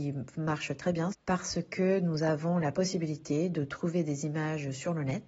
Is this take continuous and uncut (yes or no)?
no